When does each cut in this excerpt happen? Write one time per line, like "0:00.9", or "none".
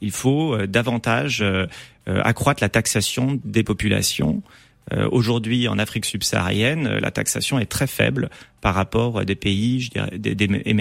none